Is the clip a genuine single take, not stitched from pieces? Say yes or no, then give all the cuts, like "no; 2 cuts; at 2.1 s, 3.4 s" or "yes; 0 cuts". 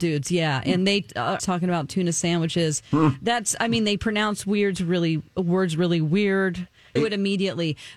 no; 2 cuts; at 1.4 s, 7.0 s